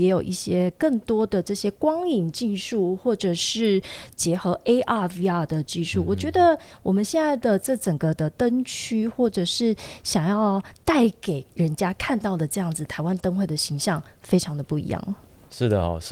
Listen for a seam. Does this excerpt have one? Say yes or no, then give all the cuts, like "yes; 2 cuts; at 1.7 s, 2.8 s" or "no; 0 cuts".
no; 0 cuts